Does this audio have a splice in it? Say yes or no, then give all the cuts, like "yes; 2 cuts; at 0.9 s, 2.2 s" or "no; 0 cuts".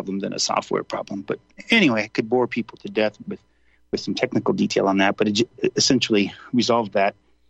no; 0 cuts